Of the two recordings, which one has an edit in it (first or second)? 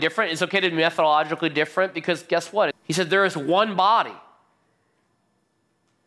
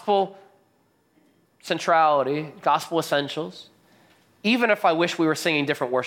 first